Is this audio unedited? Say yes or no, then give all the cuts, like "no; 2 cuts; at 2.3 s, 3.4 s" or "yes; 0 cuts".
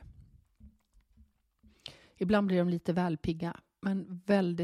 no; 1 cut; at 2.1 s